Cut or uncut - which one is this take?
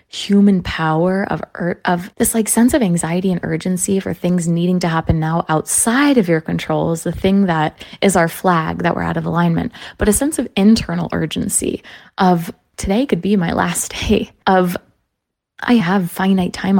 cut